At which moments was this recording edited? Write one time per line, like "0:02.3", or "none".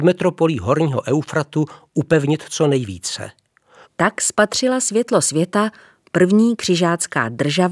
0:03.8